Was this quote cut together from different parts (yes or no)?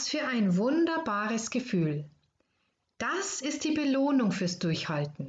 no